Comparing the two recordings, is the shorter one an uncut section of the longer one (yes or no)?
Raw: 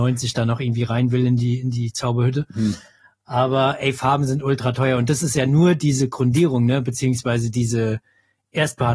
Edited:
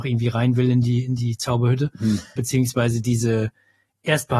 no